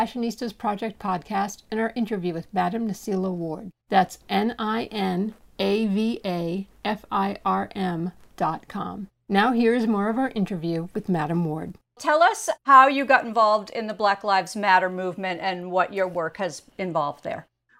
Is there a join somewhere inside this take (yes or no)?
yes